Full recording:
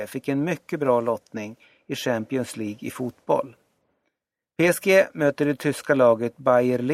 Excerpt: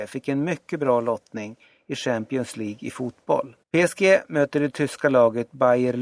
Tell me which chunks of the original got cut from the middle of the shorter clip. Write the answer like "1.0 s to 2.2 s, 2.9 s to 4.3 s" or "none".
3.6 s to 4.5 s